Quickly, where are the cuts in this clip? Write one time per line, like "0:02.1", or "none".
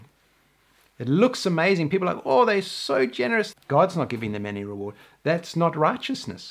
0:03.5